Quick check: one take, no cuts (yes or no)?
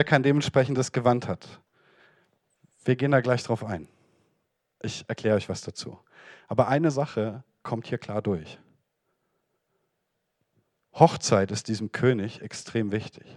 yes